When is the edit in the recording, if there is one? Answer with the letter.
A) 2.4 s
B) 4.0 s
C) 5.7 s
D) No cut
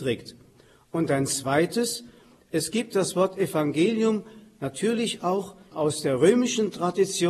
C